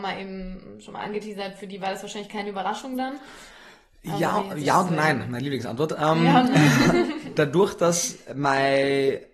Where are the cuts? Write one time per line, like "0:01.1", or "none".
none